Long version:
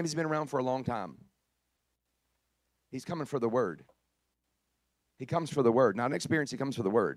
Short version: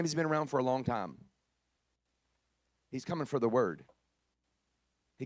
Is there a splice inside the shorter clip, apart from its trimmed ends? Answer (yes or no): no